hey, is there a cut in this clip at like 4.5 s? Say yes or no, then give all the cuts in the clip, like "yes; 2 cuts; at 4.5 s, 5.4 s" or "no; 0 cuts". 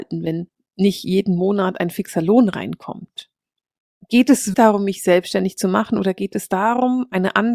yes; 1 cut; at 4.5 s